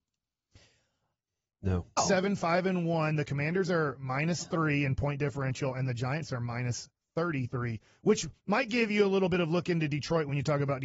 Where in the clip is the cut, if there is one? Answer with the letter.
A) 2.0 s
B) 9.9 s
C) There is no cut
A